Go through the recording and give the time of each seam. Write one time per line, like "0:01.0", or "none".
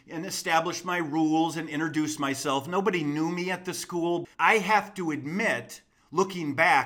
0:04.3